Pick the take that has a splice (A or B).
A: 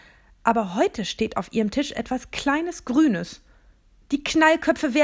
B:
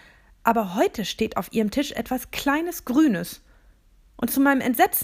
A